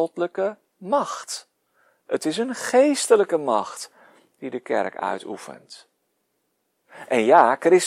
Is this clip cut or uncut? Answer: uncut